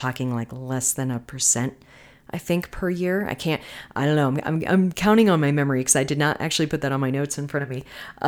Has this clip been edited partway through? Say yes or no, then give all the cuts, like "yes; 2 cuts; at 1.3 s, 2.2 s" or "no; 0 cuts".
no; 0 cuts